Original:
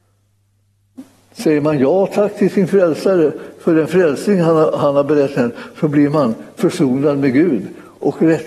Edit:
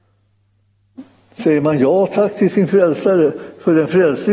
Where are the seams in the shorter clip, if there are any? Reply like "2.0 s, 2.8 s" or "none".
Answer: none